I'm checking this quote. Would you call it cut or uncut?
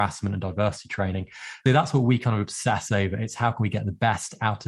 uncut